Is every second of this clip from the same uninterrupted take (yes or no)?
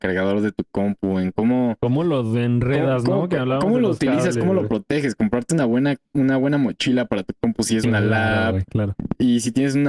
yes